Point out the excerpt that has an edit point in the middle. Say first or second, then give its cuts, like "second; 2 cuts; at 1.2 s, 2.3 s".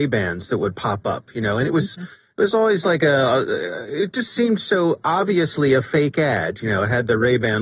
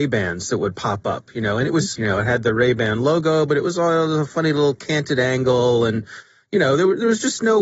second; 1 cut; at 2.0 s